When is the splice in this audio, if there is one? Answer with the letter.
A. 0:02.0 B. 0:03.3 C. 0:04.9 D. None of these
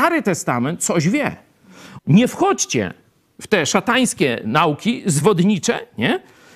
A